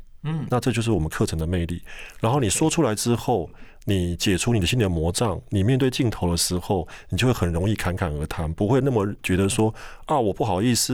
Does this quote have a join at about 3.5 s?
no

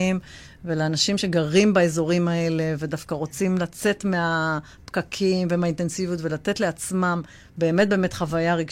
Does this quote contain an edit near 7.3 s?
no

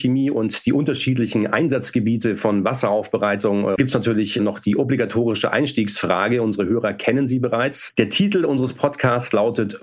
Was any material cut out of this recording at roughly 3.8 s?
yes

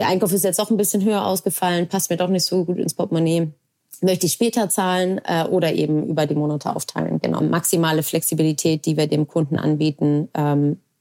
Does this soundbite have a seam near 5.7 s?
no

